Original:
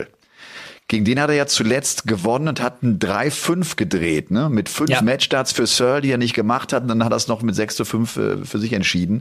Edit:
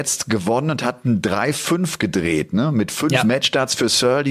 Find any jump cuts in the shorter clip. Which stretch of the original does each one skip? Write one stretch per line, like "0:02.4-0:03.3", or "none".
none